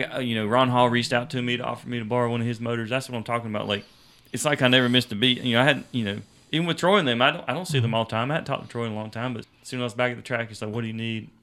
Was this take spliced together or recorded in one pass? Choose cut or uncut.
cut